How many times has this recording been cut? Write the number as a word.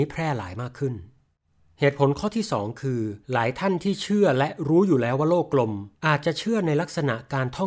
two